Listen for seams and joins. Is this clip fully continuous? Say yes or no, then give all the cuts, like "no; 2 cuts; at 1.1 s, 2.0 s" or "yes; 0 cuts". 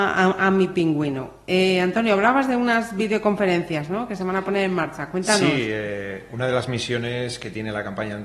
yes; 0 cuts